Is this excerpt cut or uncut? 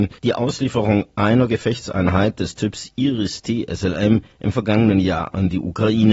uncut